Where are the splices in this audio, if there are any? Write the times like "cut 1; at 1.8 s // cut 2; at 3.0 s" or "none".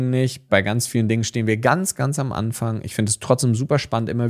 cut 1; at 1.9 s